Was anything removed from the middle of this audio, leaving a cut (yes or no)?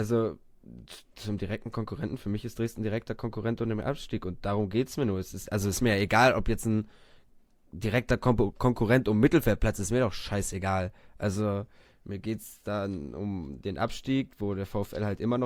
no